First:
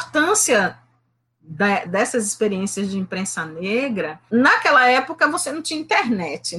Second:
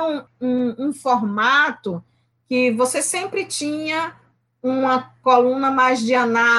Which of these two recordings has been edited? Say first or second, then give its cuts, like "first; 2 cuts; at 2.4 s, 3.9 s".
first; 2 cuts; at 1.9 s, 4.3 s